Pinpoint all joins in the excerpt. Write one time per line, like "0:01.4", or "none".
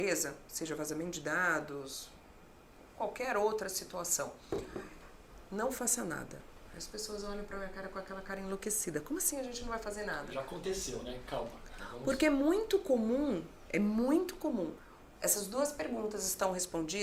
0:11.8
0:15.1